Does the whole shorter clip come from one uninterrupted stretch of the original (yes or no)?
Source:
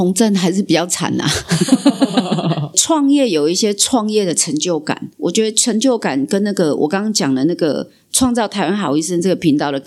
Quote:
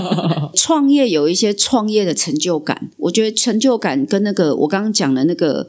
yes